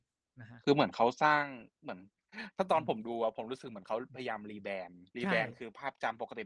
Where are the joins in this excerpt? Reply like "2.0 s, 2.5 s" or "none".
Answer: 5.1 s